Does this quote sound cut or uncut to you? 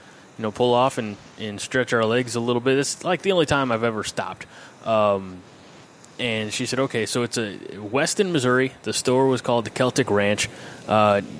uncut